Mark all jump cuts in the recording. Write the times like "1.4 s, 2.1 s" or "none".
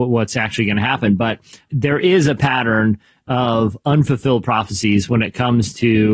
1.7 s